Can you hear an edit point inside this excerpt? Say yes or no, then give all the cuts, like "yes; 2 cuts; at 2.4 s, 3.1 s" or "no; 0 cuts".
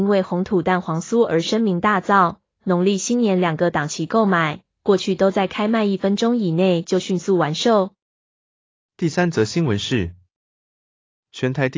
yes; 1 cut; at 2.5 s